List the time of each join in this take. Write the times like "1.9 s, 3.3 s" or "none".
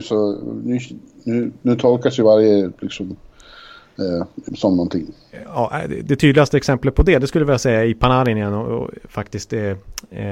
4.5 s